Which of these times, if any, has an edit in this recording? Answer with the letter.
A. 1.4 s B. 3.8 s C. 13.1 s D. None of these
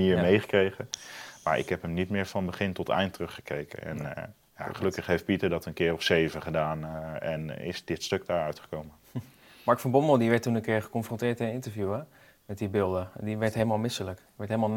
D